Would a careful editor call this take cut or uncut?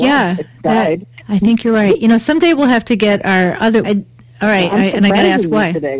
cut